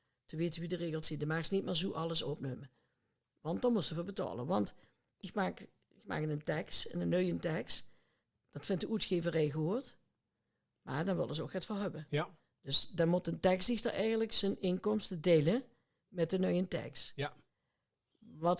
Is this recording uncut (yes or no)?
yes